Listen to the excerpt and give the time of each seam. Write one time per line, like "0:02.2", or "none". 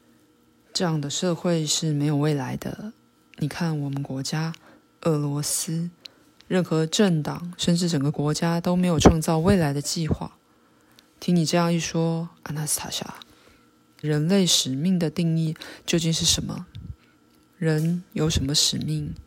0:14.0